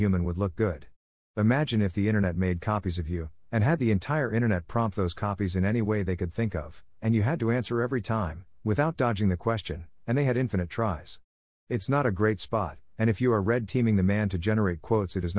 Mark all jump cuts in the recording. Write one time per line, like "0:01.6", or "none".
0:11.5